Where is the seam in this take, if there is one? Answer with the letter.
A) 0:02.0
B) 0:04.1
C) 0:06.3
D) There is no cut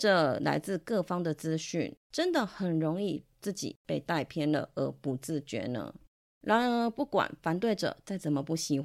A